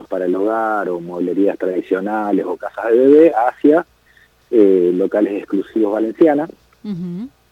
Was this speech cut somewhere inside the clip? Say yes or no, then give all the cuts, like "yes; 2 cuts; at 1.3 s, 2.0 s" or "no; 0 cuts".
no; 0 cuts